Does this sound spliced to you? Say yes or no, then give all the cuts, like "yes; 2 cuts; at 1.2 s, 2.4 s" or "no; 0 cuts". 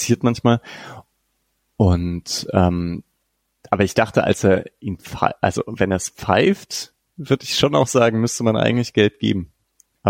no; 0 cuts